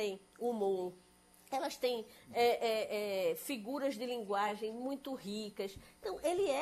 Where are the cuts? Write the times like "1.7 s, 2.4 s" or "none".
none